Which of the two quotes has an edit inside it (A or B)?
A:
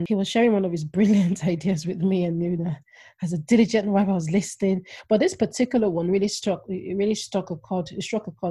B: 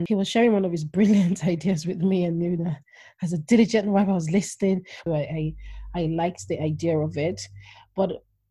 B